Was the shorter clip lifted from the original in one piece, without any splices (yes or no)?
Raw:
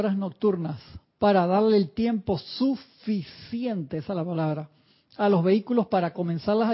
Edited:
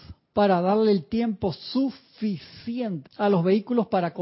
no